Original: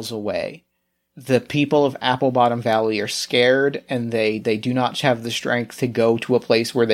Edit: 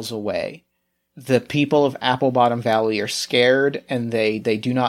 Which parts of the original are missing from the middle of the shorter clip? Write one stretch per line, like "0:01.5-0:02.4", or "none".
none